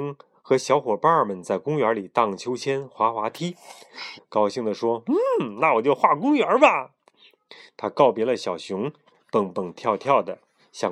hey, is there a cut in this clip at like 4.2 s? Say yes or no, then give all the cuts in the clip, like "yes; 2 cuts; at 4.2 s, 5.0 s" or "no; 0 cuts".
yes; 1 cut; at 4.2 s